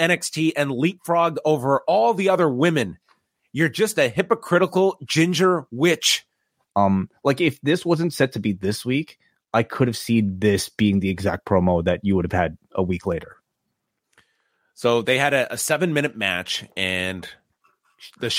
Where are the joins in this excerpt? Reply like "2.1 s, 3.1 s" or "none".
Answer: 6.6 s